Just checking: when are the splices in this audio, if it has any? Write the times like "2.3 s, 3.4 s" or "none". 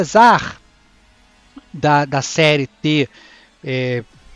none